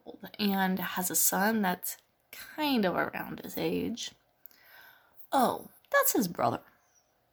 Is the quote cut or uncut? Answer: cut